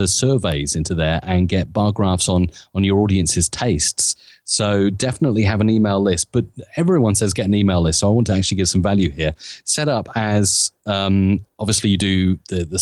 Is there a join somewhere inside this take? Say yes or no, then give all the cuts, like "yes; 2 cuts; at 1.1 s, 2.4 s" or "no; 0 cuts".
no; 0 cuts